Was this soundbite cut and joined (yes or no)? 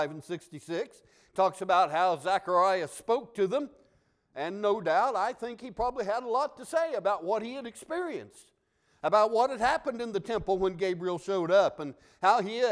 no